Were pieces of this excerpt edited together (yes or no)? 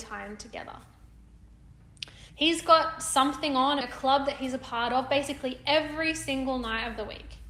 yes